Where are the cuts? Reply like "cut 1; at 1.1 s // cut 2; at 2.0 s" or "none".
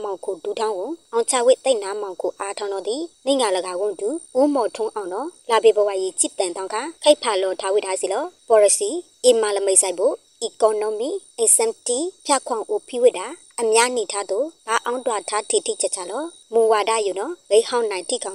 none

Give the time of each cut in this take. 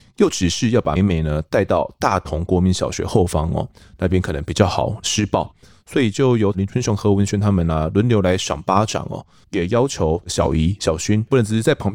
cut 1; at 1.0 s // cut 2; at 5.7 s // cut 3; at 9.4 s

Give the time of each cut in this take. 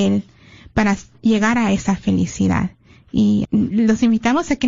cut 1; at 3.5 s

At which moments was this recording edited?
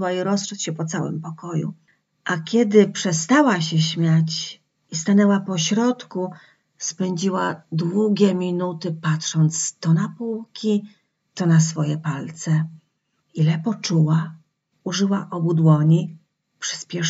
cut 1; at 13.2 s // cut 2; at 14.7 s

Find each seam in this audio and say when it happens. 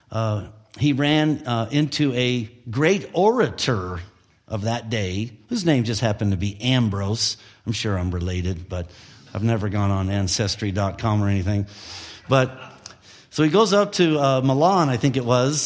none

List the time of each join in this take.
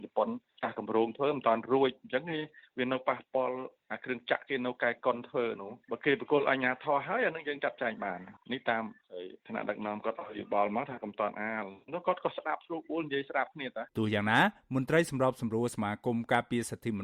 cut 1; at 13.9 s

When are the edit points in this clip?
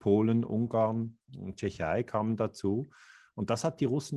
none

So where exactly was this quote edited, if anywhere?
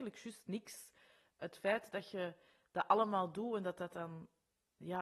none

